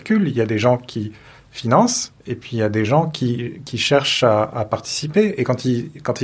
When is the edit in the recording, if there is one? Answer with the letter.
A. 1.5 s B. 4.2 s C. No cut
C